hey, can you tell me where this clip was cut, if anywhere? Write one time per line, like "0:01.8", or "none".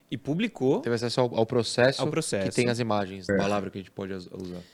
0:03.3